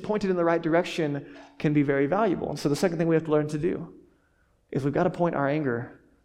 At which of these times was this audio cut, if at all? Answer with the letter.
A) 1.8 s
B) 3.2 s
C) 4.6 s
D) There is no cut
D